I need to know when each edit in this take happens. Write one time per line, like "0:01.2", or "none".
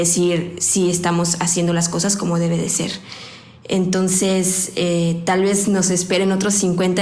none